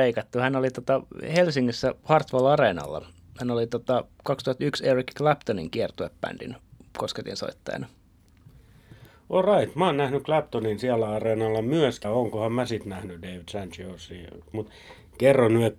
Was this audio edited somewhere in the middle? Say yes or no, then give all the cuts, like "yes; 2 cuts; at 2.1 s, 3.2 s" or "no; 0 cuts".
yes; 2 cuts; at 12.0 s, 14.5 s